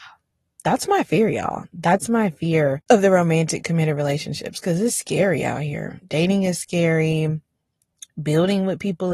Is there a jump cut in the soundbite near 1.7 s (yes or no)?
no